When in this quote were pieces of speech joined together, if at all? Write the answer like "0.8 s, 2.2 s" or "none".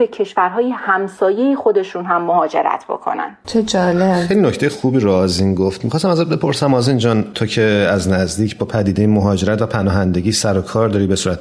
none